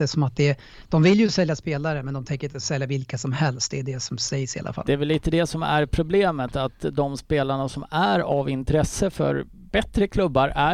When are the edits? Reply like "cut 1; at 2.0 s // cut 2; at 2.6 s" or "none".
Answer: none